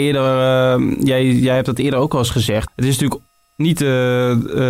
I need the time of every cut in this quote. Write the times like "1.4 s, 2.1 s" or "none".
2.7 s